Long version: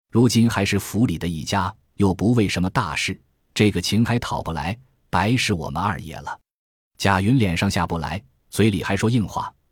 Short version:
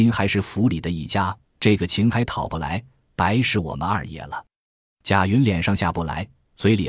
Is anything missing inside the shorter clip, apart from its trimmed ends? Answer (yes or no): yes